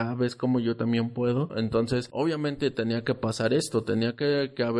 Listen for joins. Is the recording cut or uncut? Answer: cut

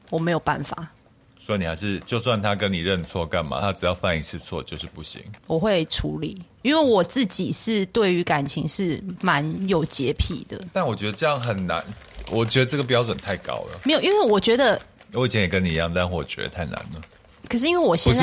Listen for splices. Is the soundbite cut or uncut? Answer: uncut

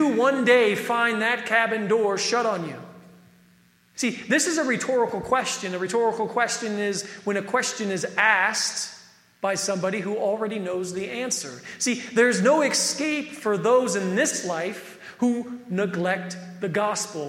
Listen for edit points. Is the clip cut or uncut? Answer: cut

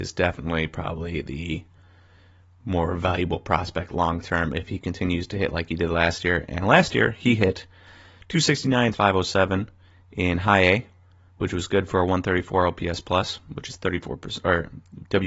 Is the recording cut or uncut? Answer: cut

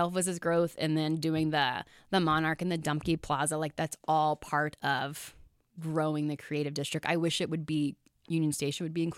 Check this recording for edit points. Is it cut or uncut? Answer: uncut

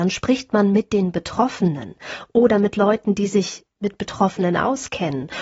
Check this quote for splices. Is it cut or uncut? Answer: uncut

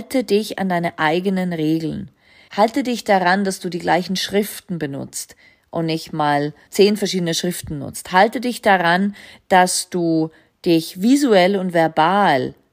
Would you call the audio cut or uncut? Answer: cut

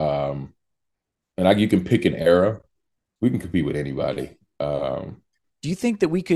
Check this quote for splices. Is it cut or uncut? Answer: uncut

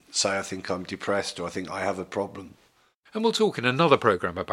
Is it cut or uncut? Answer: uncut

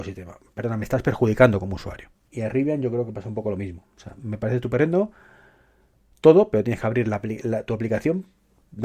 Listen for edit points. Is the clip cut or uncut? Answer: uncut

